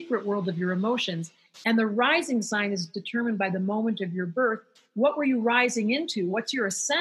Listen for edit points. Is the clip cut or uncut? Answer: uncut